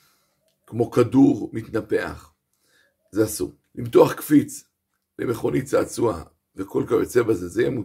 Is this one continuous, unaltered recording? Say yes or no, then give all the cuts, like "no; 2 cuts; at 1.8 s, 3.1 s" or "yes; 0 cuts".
no; 1 cut; at 3.6 s